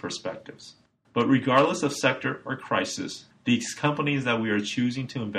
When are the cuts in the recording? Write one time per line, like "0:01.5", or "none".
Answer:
0:01.0